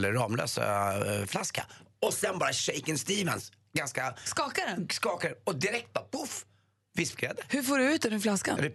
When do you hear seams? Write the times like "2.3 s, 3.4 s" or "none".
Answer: none

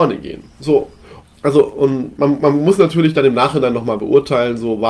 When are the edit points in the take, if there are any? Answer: 1.2 s

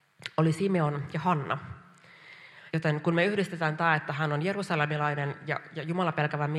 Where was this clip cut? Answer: 2.7 s

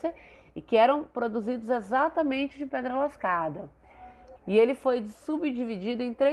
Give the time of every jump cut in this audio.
4.4 s

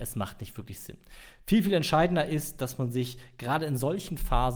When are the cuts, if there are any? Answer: none

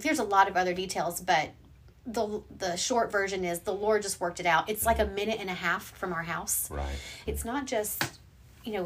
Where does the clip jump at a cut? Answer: 7.3 s

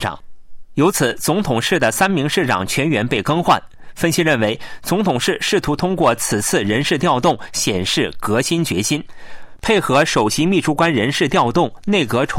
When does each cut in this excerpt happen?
none

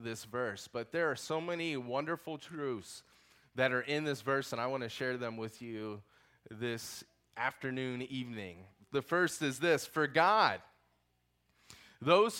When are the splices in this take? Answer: none

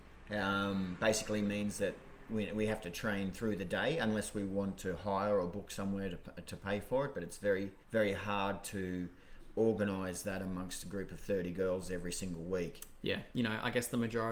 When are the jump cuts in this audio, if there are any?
7.8 s, 13.3 s

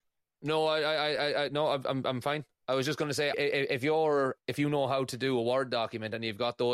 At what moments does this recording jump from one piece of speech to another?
3.3 s, 4.4 s

